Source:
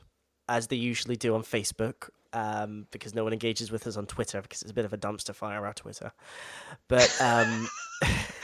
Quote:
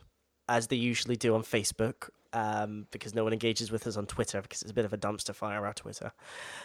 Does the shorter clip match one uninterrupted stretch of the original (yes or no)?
yes